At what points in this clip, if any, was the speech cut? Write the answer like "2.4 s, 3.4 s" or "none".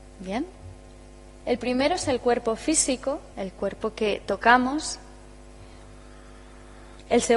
1.4 s, 3.3 s

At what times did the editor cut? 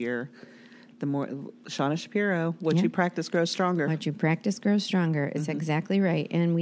none

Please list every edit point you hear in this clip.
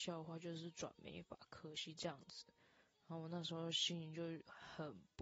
none

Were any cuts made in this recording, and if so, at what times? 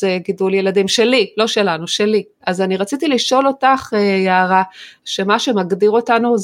2.4 s, 5.0 s

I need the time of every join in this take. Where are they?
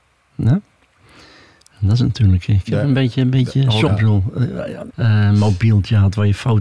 3.9 s, 4.9 s

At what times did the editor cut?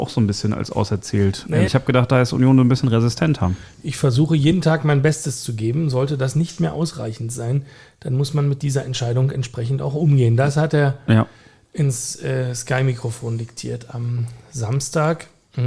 1.7 s

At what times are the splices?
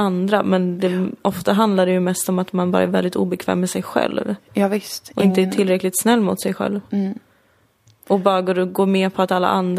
none

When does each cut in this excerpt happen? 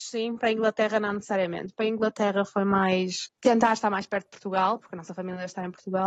none

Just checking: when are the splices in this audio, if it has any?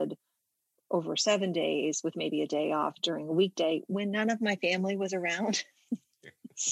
none

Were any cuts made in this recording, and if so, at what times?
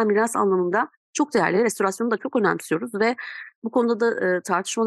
none

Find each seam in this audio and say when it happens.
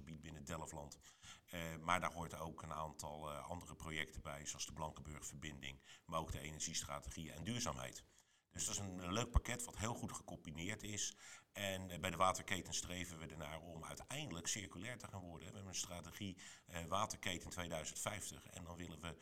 none

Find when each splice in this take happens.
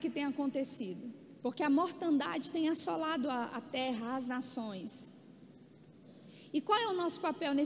1.4 s

